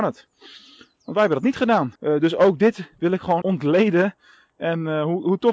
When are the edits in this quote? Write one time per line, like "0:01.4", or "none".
0:02.0
0:03.4